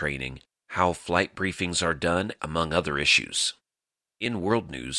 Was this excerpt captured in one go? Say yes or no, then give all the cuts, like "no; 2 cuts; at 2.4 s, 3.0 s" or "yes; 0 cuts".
no; 1 cut; at 2.4 s